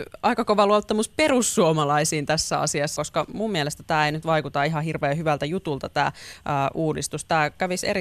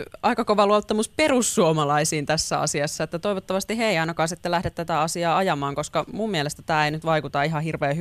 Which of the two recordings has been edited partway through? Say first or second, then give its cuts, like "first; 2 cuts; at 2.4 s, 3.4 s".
first; 1 cut; at 3.0 s